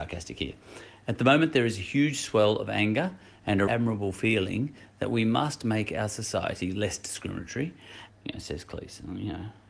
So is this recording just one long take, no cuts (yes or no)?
no